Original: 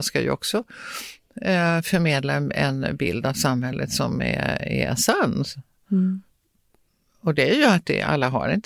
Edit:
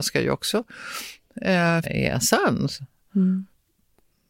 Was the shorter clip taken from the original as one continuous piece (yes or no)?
no